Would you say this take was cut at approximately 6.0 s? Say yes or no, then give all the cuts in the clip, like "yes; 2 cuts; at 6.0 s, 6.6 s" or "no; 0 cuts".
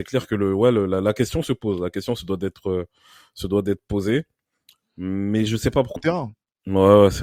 yes; 1 cut; at 6.0 s